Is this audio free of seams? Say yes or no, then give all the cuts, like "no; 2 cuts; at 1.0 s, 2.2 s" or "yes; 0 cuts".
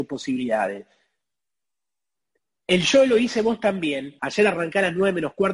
no; 1 cut; at 4.2 s